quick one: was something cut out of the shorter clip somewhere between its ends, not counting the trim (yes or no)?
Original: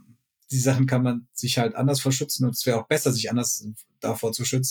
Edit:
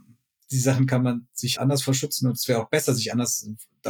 yes